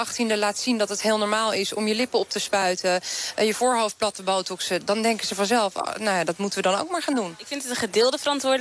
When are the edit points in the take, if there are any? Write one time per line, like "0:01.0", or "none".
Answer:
none